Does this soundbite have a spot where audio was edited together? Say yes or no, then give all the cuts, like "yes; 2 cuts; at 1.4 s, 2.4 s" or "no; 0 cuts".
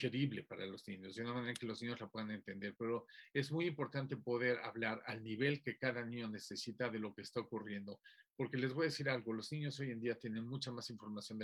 no; 0 cuts